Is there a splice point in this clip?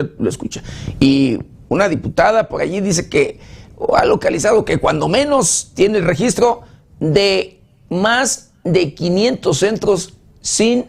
no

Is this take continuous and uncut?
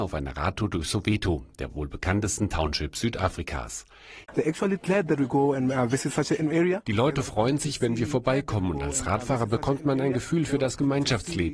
no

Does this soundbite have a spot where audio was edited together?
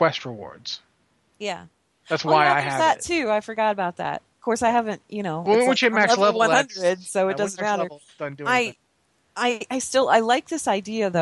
yes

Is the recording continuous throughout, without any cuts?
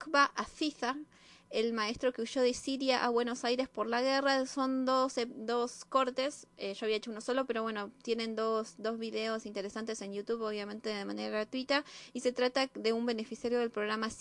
yes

